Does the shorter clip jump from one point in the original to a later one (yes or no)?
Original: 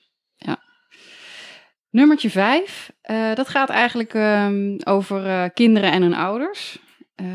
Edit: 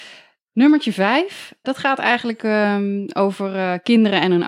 yes